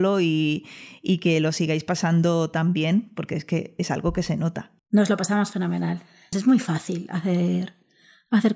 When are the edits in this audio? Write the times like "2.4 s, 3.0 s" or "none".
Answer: 4.8 s, 6.3 s